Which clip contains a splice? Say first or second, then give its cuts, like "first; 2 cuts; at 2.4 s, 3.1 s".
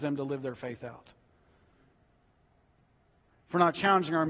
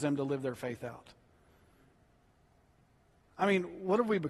first; 1 cut; at 3.3 s